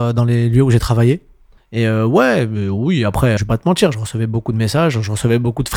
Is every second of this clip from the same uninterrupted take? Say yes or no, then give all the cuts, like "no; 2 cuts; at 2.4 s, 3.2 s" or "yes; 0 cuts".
no; 2 cuts; at 1.6 s, 3.4 s